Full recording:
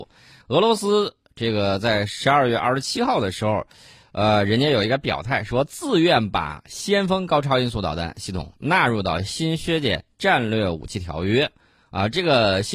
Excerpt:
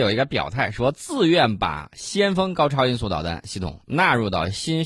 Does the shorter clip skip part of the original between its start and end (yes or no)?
no